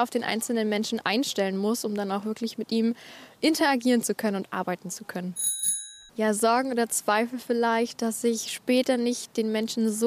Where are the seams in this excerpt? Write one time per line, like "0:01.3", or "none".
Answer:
0:06.1